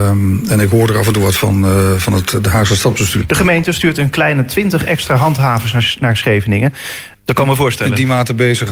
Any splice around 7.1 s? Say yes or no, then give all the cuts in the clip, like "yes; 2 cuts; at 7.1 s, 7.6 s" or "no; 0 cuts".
yes; 2 cuts; at 3.2 s, 7.1 s